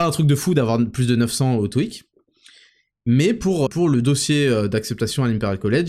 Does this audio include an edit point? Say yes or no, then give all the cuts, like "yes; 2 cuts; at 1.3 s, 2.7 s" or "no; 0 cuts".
yes; 1 cut; at 3.7 s